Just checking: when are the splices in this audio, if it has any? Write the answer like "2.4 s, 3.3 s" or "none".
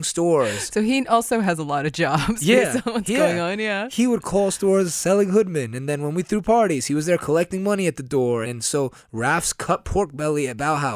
8.4 s